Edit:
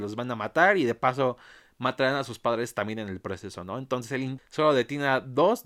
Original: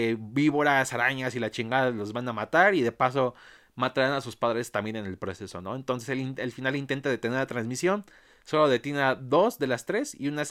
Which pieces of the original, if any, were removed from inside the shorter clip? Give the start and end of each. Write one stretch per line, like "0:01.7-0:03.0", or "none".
0:06.4-0:08.3